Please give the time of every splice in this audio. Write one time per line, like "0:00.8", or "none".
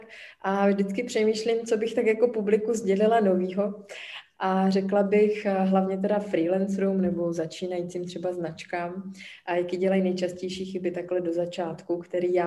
0:04.3